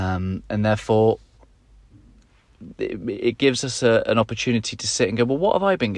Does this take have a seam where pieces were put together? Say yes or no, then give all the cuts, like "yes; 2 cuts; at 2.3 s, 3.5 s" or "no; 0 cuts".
no; 0 cuts